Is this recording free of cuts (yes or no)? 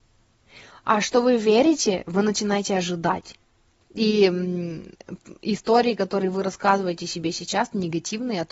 no